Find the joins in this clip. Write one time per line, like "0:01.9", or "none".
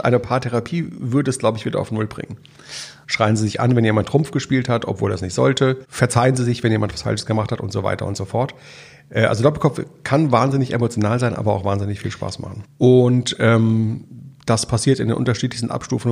0:03.0
0:12.6